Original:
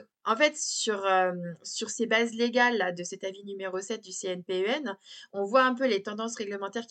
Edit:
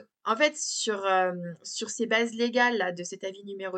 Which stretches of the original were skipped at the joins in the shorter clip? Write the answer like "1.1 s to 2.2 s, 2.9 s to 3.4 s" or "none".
none